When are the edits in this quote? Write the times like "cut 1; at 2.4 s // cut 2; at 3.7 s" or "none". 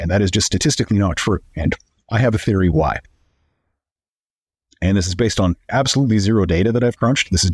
none